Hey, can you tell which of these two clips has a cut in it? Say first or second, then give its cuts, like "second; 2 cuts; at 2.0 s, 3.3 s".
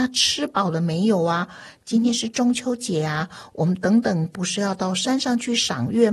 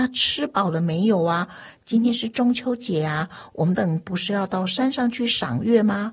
second; 1 cut; at 3.7 s